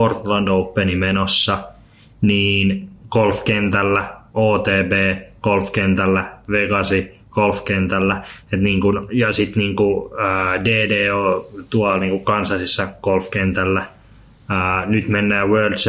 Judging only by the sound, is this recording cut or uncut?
uncut